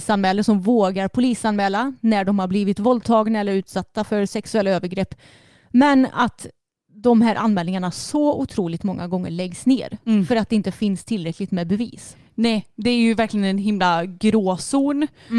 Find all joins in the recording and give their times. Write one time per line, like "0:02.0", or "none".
none

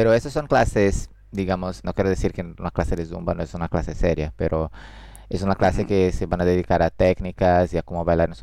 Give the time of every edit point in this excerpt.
0:01.8

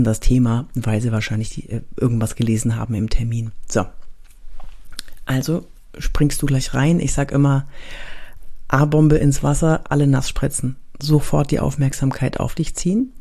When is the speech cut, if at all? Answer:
none

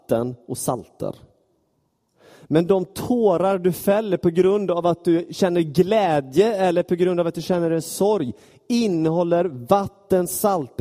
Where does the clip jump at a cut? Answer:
none

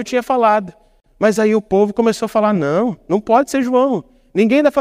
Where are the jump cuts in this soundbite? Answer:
none

